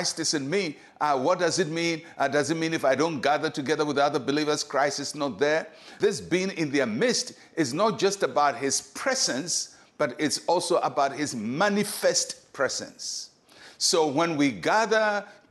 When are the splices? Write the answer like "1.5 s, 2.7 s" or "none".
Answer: none